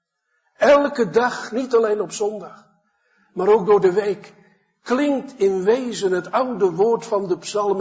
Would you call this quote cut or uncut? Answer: uncut